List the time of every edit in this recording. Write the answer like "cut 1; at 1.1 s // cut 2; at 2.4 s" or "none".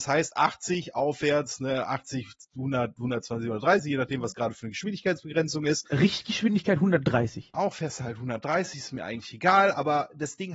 cut 1; at 7.5 s